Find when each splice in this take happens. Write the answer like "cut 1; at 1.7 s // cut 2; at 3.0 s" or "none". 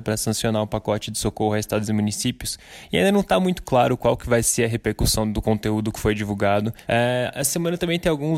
cut 1; at 2.9 s // cut 2; at 6.8 s